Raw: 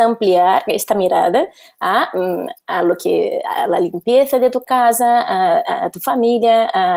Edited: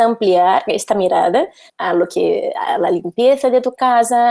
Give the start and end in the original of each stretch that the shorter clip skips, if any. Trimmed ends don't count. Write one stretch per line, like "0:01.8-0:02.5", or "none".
0:01.7-0:02.6